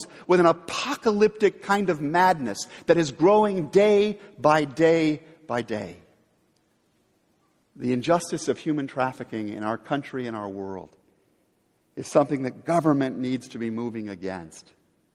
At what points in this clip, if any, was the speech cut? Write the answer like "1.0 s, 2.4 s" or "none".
7.6 s